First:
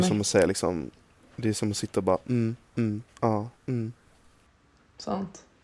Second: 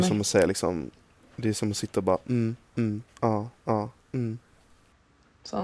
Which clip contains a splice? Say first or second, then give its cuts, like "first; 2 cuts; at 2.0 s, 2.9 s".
first; 1 cut; at 3.6 s